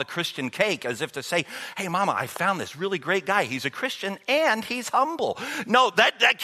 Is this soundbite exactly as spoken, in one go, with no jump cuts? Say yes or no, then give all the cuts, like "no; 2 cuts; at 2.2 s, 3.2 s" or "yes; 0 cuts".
yes; 0 cuts